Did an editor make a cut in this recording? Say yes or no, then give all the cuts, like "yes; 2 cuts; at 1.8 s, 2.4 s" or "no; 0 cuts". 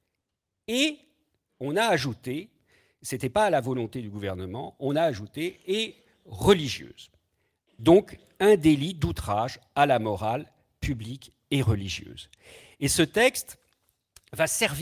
no; 0 cuts